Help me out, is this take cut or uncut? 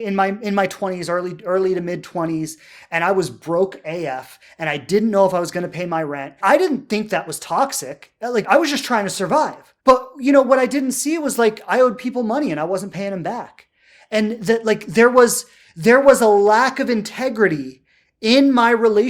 cut